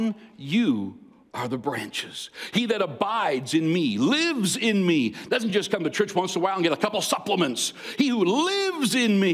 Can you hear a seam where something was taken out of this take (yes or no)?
no